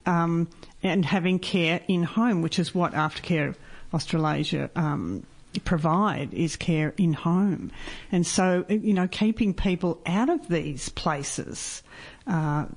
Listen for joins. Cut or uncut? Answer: uncut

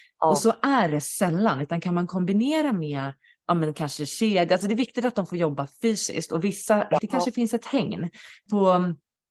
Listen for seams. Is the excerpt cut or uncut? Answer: cut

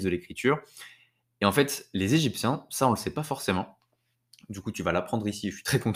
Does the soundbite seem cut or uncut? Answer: uncut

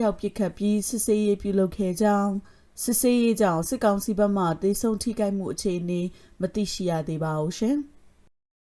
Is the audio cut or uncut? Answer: uncut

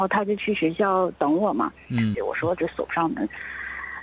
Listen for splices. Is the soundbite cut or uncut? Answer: cut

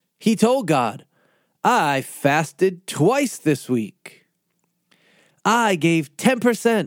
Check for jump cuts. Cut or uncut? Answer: uncut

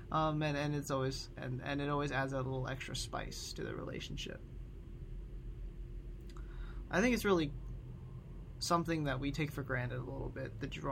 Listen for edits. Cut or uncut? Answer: cut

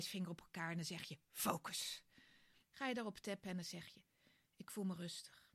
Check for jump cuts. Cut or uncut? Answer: cut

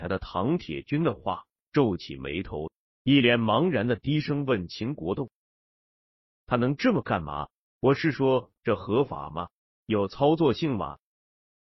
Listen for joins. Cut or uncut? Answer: uncut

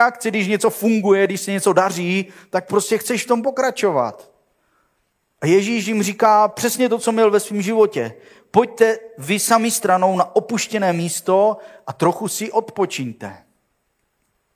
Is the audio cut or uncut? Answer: uncut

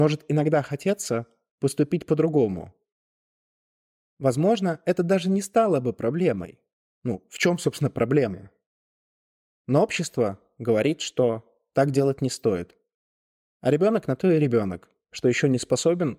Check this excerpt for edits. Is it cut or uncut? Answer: cut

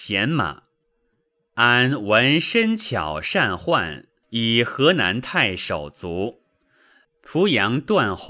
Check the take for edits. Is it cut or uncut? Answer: cut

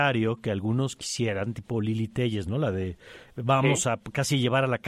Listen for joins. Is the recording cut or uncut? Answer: uncut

